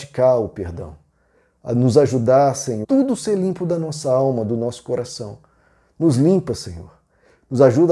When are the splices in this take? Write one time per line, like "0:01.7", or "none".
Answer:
0:02.8